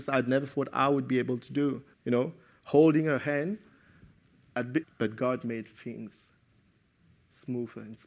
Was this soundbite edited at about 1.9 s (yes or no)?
yes